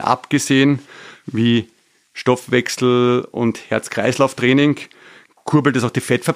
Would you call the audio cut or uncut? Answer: uncut